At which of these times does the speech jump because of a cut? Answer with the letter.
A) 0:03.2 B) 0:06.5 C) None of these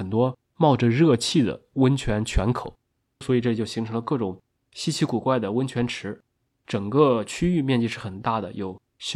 A